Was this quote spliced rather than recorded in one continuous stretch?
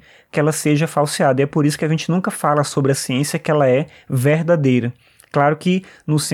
no; 0 cuts

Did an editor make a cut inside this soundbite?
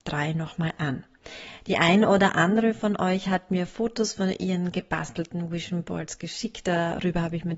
no; 0 cuts

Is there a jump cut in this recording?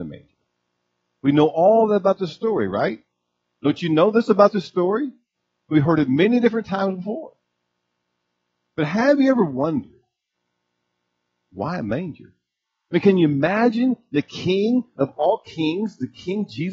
no; 0 cuts

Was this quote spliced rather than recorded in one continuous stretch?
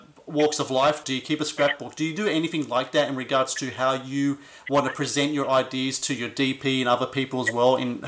yes; 1 cut; at 1.0 s

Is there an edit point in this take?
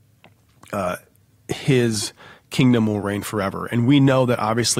no; 0 cuts

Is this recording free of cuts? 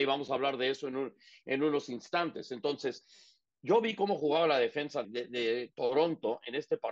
no; 1 cut; at 5.0 s

